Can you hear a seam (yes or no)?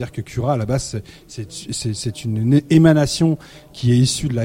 no